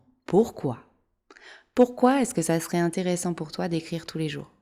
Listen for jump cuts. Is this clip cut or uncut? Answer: uncut